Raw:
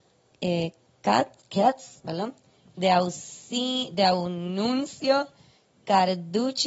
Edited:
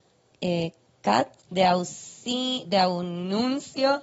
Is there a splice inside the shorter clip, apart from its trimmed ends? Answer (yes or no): yes